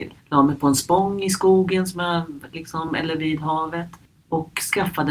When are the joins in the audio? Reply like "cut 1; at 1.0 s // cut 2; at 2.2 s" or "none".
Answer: none